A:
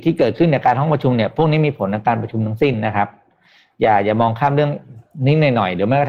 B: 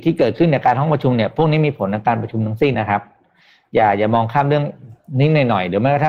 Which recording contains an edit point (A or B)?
B